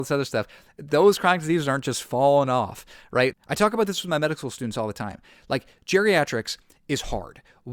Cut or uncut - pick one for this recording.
cut